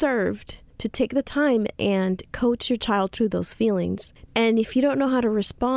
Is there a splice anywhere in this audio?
yes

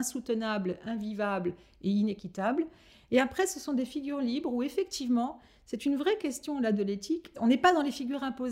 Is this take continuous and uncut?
no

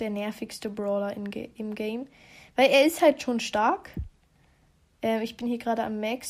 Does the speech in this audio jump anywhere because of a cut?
no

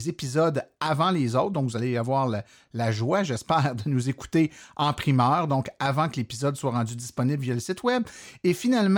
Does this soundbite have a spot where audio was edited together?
no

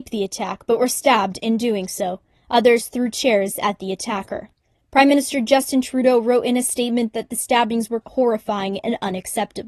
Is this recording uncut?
no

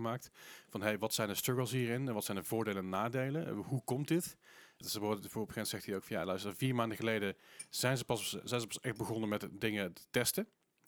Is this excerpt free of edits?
no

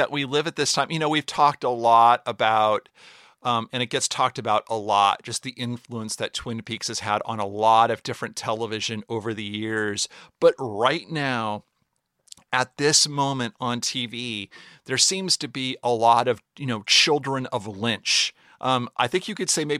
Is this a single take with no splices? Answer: yes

